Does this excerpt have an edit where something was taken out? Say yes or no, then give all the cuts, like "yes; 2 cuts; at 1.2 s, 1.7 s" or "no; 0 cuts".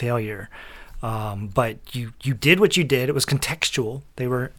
no; 0 cuts